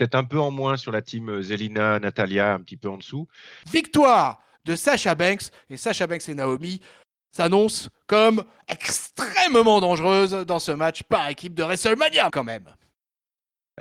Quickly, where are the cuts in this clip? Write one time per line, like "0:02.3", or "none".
0:03.6
0:12.3